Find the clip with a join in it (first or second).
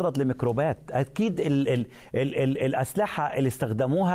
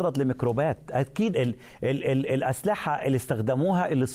second